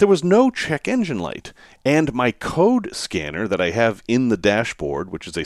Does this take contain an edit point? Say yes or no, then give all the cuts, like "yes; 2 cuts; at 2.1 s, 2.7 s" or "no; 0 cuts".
no; 0 cuts